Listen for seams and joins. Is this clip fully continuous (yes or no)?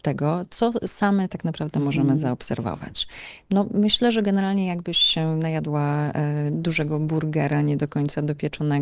yes